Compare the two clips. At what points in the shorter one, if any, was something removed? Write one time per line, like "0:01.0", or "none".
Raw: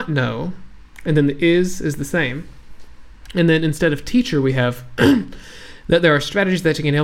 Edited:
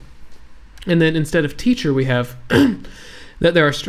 none